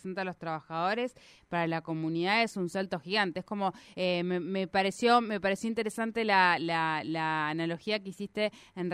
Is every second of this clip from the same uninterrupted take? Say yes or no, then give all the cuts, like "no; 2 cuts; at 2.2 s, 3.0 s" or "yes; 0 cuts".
yes; 0 cuts